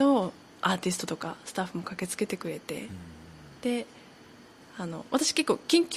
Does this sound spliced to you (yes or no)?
no